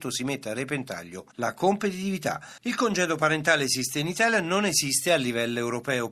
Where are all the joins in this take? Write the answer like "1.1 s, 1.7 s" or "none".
2.6 s